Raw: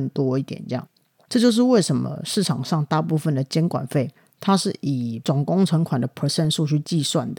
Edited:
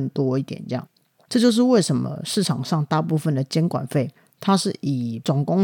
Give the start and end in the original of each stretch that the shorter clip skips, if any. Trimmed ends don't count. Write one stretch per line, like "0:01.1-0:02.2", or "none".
none